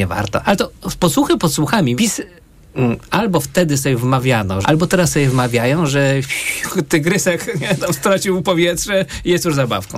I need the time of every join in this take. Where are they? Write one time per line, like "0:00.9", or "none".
0:02.0
0:04.6